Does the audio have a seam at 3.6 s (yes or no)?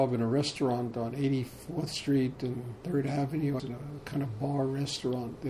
yes